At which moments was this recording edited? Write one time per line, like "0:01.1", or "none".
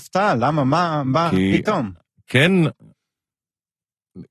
none

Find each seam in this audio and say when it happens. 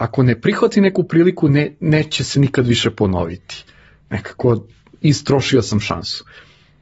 none

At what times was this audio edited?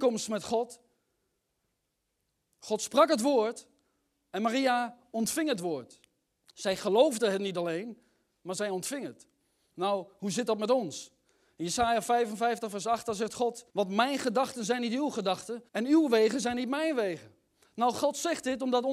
0:13.7
0:15.7

